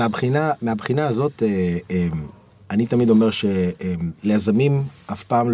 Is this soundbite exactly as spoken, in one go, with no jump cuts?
yes; 0 cuts

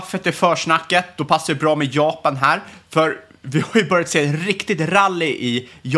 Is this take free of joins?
yes; 0 cuts

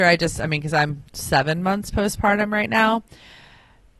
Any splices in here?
yes; 1 cut; at 1.1 s

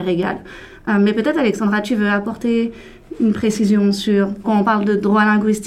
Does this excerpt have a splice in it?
yes; 1 cut; at 4.4 s

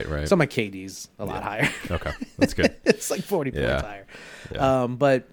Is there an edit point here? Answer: no; 0 cuts

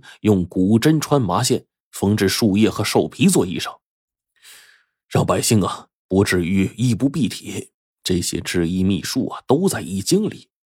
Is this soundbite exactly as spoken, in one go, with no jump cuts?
yes; 0 cuts

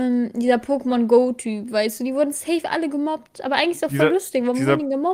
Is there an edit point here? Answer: no; 0 cuts

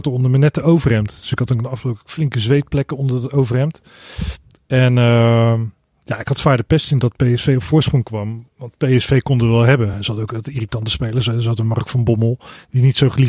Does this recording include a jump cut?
no; 0 cuts

